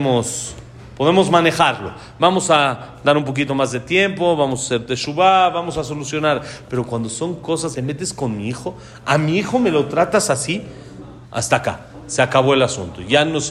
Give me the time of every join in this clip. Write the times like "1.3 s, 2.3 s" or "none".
7.7 s, 11.2 s